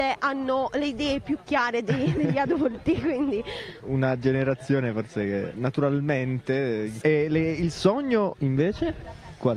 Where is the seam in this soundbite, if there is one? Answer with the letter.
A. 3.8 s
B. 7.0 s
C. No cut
B